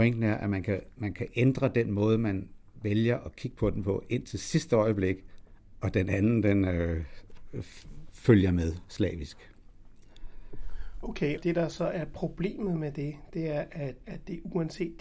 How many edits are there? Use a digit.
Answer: 2